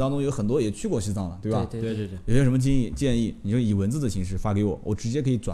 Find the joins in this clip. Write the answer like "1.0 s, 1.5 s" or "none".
none

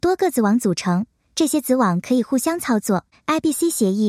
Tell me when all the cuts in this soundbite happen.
3.1 s

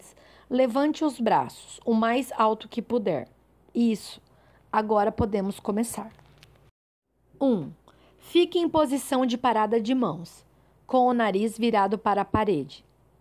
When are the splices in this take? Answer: none

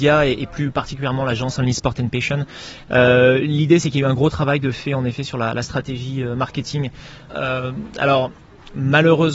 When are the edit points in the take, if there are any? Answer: 7.3 s

